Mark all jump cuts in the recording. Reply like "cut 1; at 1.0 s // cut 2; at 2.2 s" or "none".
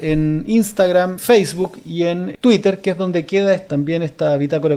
cut 1; at 1.2 s

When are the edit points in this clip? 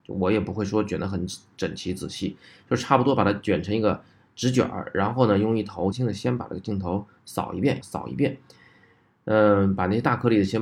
cut 1; at 5.9 s // cut 2; at 7.8 s

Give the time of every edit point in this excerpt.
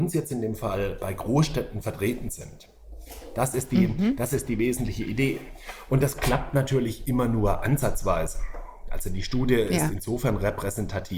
none

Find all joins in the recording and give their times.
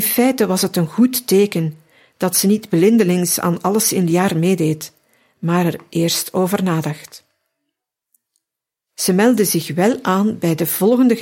cut 1; at 8.8 s

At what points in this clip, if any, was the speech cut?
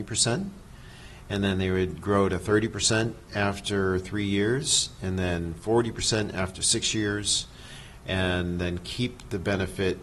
none

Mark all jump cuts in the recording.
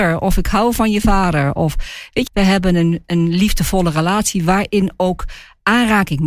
cut 1; at 2.3 s

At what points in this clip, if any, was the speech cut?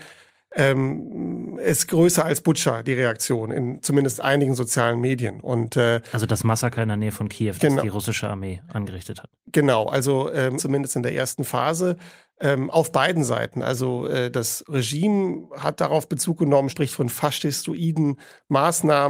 cut 1; at 10.6 s // cut 2; at 16.7 s

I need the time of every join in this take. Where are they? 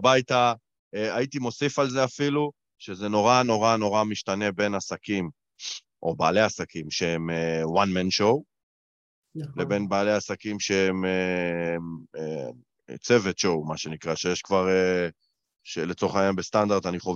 none

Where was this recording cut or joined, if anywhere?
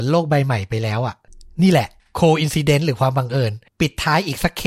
cut 1; at 3.7 s

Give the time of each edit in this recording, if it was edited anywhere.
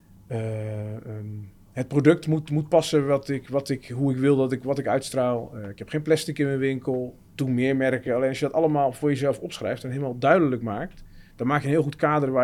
none

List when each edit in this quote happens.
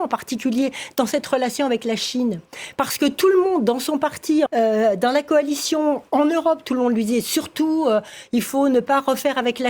cut 1; at 4.5 s

